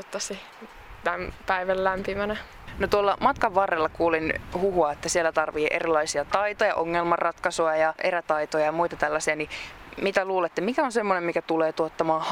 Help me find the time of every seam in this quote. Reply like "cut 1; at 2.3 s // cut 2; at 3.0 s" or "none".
none